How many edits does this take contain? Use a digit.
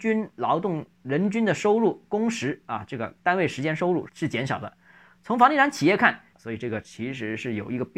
2